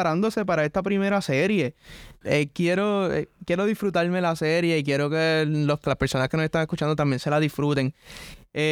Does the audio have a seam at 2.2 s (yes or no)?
yes